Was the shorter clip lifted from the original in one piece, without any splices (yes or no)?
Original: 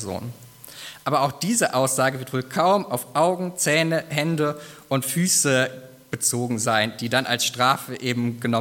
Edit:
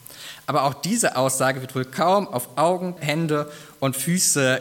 no